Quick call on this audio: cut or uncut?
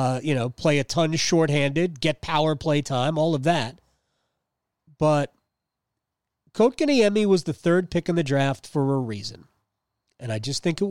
uncut